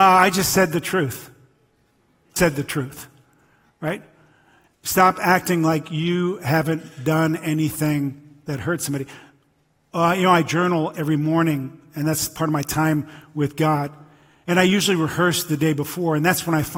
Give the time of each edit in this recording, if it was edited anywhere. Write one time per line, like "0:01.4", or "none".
0:02.4
0:04.7